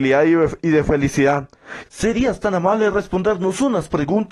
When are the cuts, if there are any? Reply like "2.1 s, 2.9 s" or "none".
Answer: 1.8 s